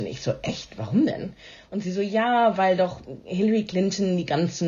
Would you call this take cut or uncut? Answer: uncut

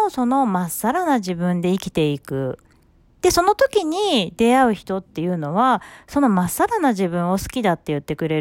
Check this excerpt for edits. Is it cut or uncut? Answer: uncut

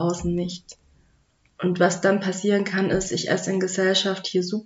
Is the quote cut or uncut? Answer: uncut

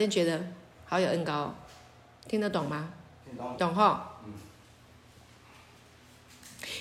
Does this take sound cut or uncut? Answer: cut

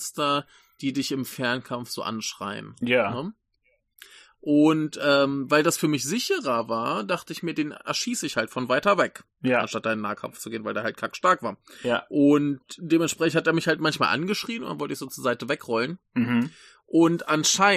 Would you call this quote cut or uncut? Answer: uncut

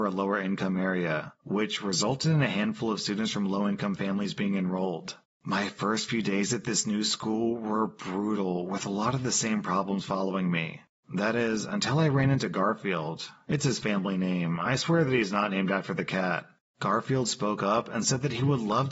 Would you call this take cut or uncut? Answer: uncut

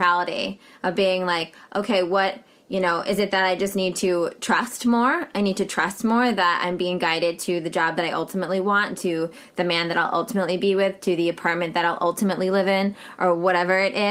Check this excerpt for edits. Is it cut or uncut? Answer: uncut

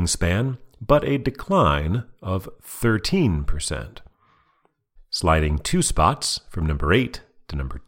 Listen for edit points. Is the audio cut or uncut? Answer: cut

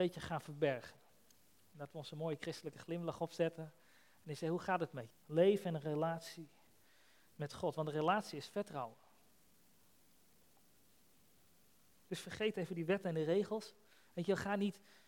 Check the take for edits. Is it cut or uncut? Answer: cut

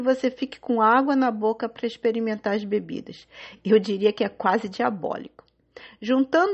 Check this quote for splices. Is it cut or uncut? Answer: uncut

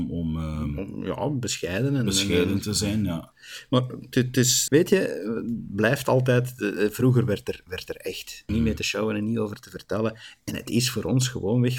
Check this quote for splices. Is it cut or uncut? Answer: cut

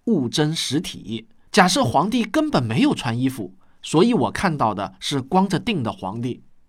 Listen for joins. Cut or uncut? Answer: cut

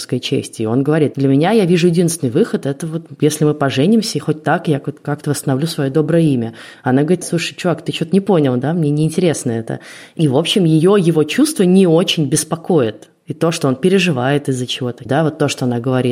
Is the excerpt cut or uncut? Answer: cut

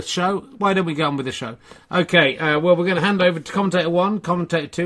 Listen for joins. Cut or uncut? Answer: uncut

